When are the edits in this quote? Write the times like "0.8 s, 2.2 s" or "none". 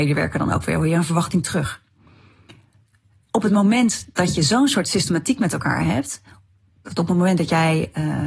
4.1 s

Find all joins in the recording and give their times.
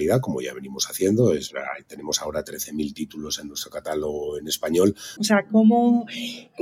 5.2 s

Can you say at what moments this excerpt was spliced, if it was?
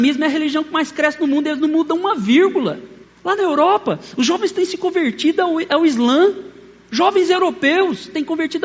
3.0 s

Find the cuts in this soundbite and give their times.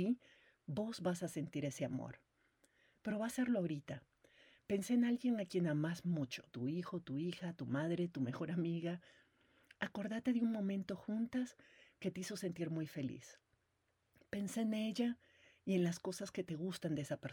6.5 s

